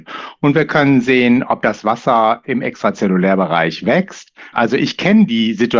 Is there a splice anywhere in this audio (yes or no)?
yes